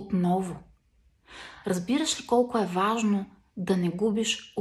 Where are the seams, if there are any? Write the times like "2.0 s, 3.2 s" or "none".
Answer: 1.6 s